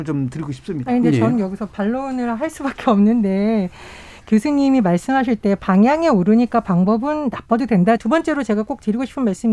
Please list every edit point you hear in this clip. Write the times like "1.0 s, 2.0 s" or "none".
8.0 s